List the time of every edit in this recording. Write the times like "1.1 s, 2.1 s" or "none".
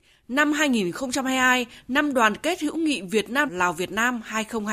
3.5 s